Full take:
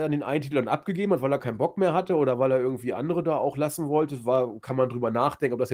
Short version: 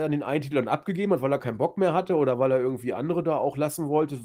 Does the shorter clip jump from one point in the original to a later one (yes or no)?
no